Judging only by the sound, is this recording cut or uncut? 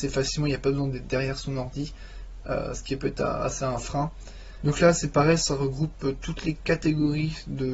cut